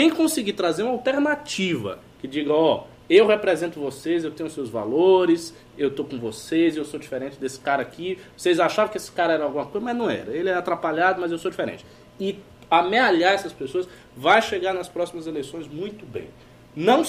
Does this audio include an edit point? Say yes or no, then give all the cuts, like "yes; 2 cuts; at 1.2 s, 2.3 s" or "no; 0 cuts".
no; 0 cuts